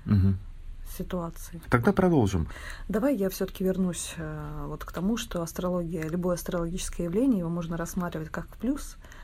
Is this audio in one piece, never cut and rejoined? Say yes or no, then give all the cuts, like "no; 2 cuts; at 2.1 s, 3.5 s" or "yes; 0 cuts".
yes; 0 cuts